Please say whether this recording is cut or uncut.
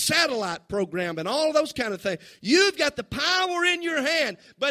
uncut